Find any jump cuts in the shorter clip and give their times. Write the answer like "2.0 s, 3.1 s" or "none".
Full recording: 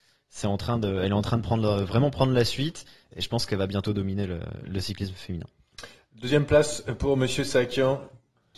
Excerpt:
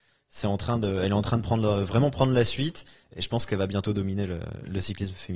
none